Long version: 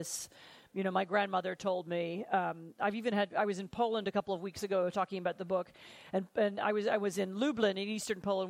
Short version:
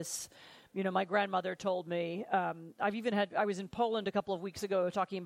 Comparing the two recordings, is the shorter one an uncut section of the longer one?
yes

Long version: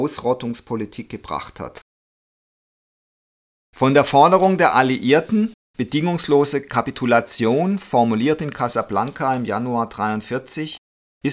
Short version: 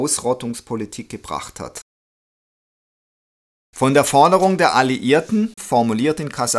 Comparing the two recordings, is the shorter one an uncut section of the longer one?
no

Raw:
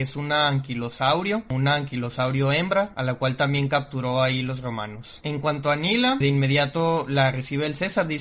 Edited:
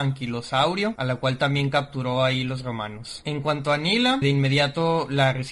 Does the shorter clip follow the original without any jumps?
no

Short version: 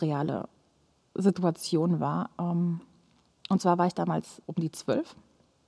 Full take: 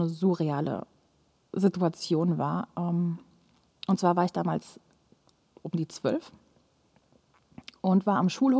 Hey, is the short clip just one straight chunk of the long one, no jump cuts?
no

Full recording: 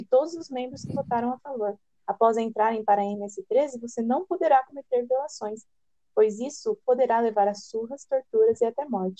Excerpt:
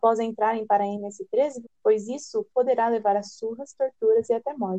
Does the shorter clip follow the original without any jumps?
no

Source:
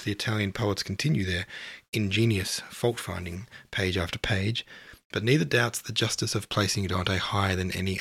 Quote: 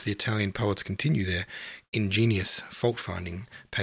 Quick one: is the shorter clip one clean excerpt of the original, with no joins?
yes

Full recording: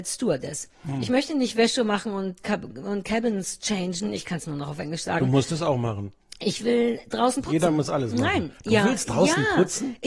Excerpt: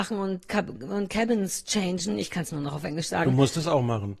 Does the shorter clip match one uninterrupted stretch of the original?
yes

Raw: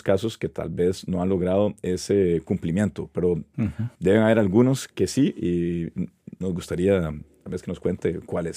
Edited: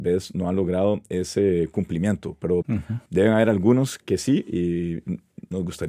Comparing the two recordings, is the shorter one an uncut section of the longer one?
no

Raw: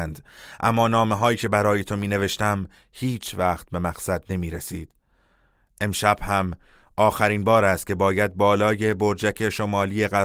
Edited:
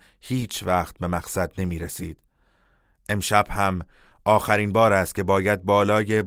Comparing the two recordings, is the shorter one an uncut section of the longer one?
yes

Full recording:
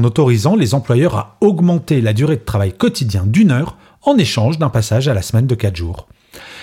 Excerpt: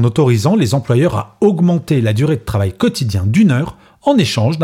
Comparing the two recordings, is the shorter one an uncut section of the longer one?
yes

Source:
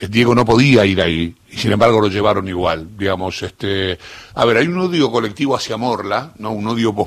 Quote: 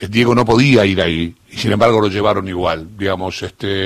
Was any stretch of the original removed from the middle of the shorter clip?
no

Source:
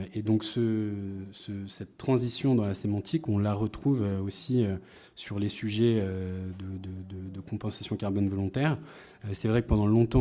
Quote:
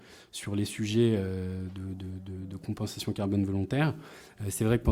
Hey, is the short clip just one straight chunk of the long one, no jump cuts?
yes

